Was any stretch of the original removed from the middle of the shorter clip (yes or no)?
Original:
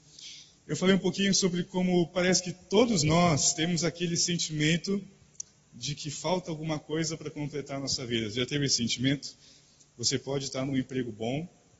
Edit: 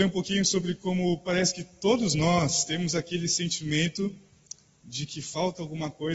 no